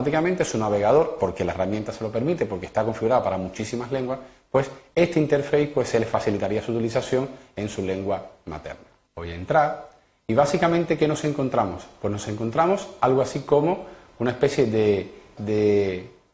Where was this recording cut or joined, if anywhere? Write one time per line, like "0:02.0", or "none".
0:09.1
0:15.4